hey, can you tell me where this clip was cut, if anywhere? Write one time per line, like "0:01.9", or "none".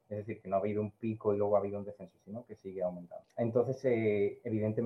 0:03.2